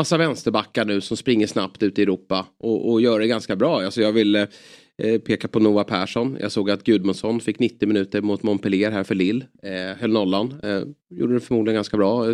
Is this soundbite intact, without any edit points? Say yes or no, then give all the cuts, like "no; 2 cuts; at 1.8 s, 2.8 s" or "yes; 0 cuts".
no; 1 cut; at 11.0 s